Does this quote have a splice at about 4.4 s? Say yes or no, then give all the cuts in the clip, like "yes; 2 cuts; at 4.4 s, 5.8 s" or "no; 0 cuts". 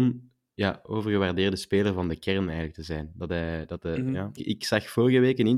yes; 1 cut; at 4.4 s